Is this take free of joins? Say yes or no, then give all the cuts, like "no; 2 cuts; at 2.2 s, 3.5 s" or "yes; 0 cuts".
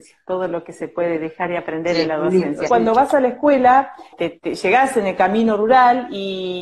no; 2 cuts; at 2.7 s, 4.1 s